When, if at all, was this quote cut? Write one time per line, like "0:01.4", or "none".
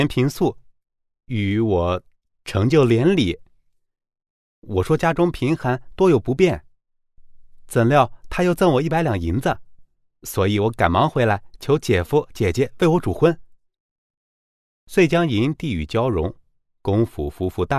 none